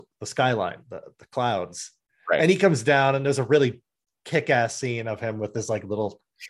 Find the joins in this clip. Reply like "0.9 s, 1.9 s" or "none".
none